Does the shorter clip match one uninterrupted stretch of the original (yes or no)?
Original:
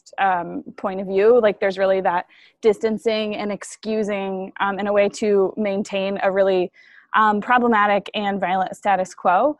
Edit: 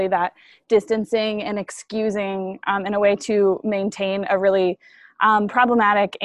yes